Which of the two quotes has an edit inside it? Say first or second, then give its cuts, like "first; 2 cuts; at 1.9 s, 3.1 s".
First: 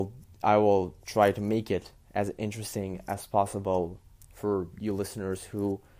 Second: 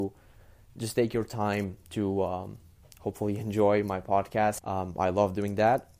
second; 1 cut; at 4.6 s